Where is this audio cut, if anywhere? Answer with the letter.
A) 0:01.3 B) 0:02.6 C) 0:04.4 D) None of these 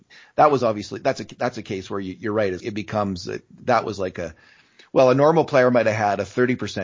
B